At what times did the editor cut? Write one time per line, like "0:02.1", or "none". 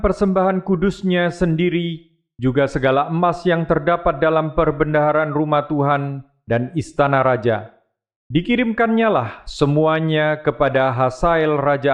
none

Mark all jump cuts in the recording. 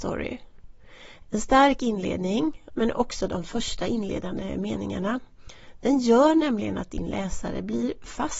0:01.2
0:02.7

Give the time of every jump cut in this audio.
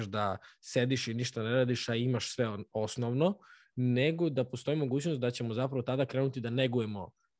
none

